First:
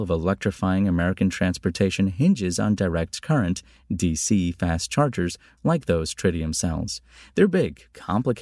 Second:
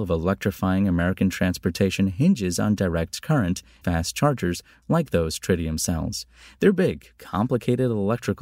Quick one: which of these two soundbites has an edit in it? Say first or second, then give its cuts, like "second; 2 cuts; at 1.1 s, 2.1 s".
second; 1 cut; at 3.8 s